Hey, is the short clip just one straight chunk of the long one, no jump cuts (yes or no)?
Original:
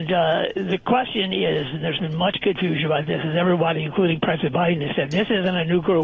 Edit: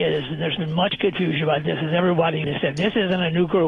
no